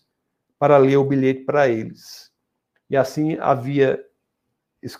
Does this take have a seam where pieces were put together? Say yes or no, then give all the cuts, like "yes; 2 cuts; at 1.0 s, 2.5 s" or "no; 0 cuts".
no; 0 cuts